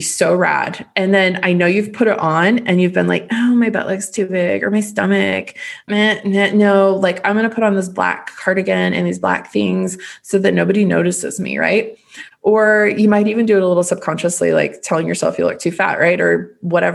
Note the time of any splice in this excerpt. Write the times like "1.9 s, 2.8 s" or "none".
none